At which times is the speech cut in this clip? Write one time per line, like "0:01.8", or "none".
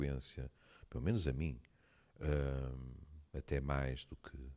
0:03.3